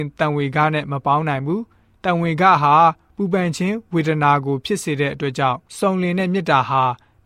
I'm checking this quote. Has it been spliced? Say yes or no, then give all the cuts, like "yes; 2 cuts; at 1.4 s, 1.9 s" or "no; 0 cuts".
yes; 1 cut; at 5.7 s